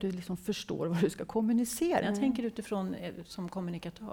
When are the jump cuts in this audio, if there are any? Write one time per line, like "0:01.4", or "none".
0:02.0